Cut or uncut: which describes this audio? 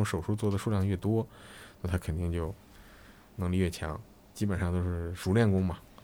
uncut